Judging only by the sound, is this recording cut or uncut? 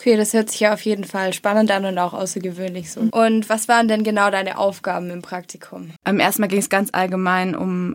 cut